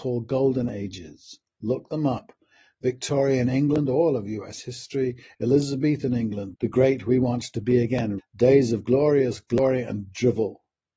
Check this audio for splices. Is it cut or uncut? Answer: cut